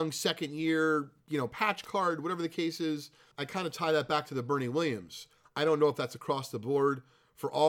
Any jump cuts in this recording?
yes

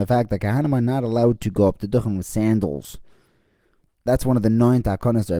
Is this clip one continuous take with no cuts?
yes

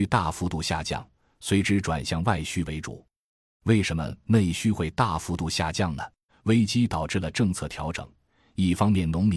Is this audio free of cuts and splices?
no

